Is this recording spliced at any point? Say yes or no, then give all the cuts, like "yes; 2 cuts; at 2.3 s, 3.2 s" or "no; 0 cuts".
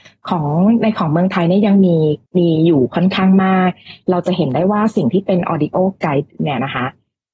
yes; 1 cut; at 2.3 s